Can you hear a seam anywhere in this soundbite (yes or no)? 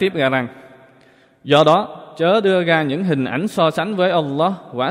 no